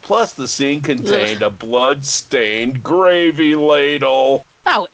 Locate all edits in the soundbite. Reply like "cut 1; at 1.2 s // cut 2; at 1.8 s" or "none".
none